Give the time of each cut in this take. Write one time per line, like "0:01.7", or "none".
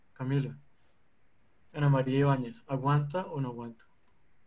none

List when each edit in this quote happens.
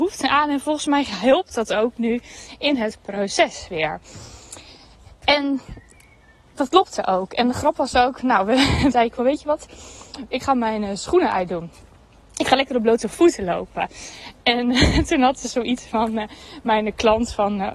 0:08.9

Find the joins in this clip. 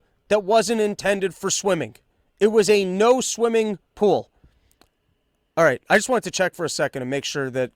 none

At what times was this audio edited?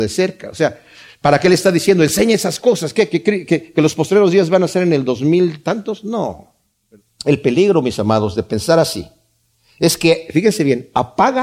none

